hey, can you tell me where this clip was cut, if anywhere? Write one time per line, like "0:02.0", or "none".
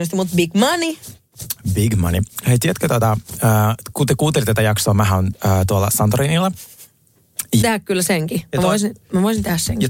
0:07.6

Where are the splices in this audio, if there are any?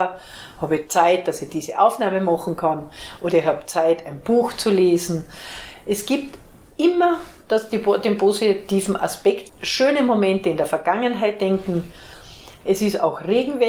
0:09.5
0:12.6

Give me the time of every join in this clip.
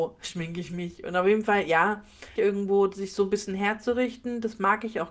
0:02.4

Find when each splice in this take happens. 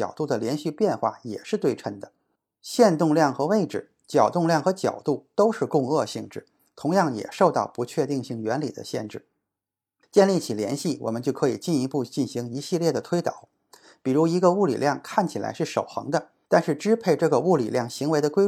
none

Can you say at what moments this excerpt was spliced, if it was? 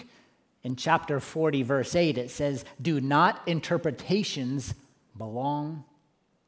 none

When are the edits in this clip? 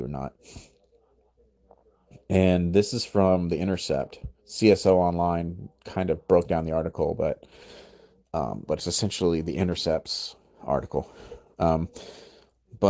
0:04.4
0:08.7

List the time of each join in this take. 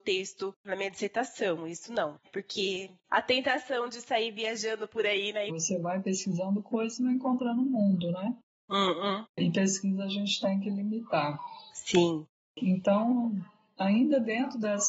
0:02.2
0:05.5

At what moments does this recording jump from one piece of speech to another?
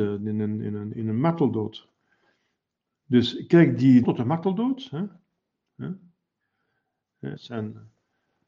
0:04.0
0:05.7
0:07.4

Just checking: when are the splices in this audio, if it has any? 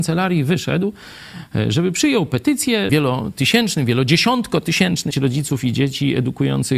0:02.9
0:05.1

